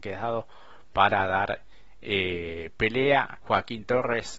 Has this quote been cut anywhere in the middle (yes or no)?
yes